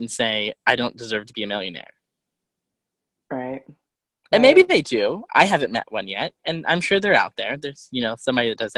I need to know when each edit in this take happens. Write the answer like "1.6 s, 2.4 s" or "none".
none